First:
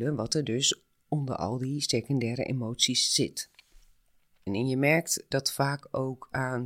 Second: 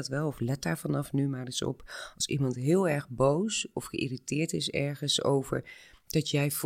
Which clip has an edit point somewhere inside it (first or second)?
first